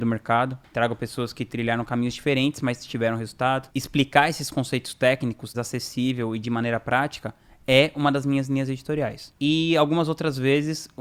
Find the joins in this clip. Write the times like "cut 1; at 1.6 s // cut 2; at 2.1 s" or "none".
cut 1; at 3.7 s // cut 2; at 5.5 s